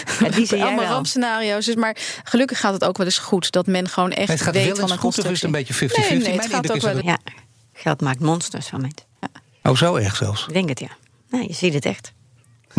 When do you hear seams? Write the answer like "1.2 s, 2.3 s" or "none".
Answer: 7.0 s